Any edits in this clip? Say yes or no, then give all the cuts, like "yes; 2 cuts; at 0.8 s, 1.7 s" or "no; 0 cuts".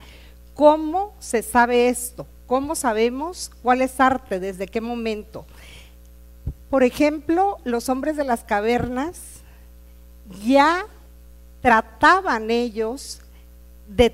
no; 0 cuts